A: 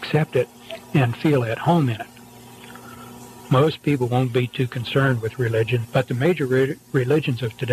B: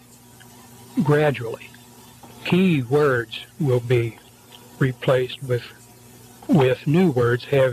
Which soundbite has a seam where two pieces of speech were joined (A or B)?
A